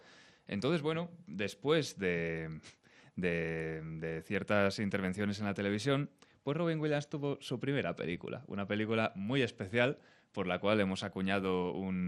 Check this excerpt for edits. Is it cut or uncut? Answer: uncut